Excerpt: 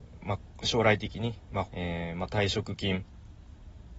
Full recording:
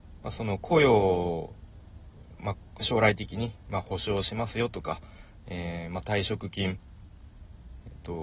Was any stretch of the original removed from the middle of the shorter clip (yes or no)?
yes